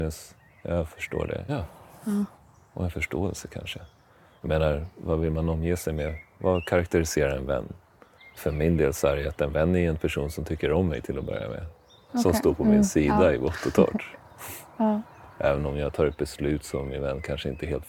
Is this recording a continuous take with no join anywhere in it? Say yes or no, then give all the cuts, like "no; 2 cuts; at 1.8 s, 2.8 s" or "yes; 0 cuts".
no; 1 cut; at 1.5 s